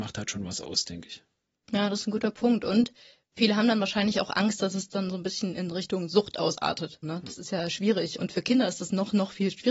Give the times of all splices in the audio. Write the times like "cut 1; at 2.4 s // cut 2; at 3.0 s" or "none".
cut 1; at 7.0 s // cut 2; at 8.2 s